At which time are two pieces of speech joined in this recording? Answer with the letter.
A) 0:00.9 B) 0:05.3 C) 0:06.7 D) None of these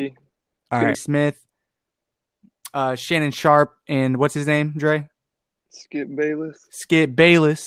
A